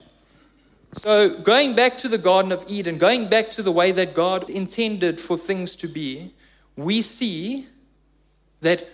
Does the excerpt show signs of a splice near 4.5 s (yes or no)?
yes